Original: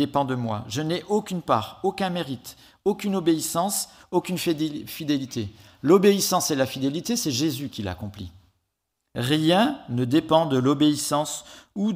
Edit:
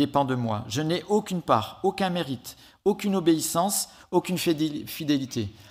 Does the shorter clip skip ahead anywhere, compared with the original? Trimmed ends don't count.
no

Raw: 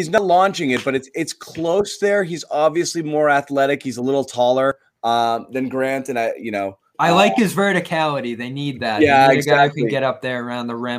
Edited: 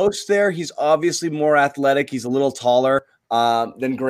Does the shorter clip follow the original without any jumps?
yes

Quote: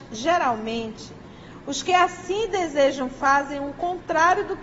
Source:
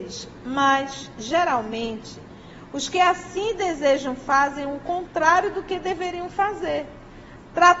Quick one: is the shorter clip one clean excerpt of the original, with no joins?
yes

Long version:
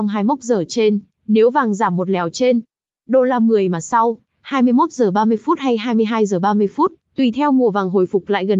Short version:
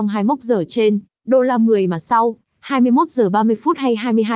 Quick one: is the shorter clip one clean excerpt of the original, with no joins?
no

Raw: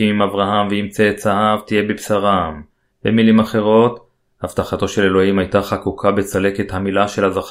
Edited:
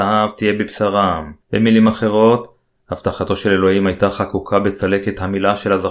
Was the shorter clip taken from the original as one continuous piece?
no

